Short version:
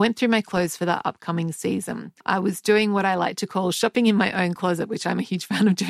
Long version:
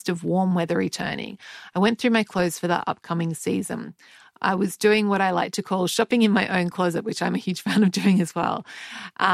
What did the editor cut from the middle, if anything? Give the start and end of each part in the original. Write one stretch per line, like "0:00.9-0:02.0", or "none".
0:04.0-0:04.4